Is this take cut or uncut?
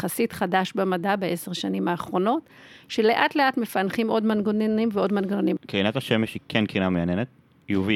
cut